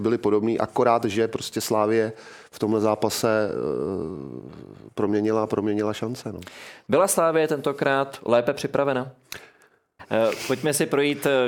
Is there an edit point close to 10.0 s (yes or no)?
yes